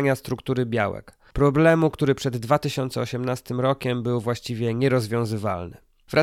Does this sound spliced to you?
no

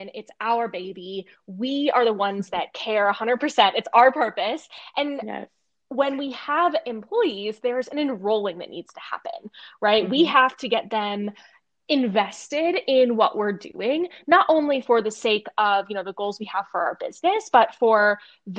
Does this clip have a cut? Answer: no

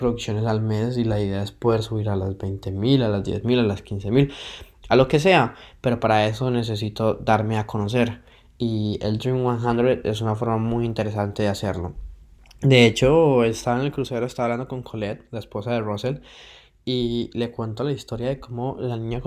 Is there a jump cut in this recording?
no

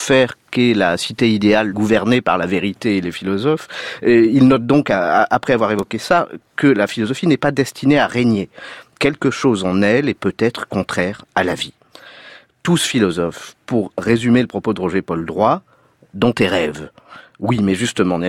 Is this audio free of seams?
no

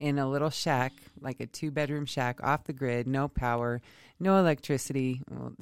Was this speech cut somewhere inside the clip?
no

